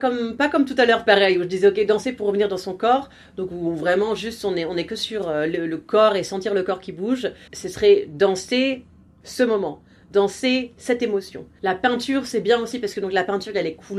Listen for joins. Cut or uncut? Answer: cut